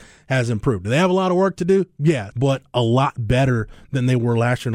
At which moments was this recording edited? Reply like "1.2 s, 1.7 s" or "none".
2.3 s